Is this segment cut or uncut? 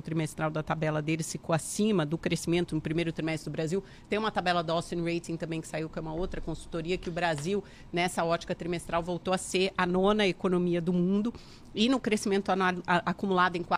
uncut